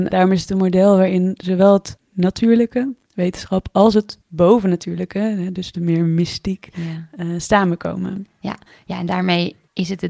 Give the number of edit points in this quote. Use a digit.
0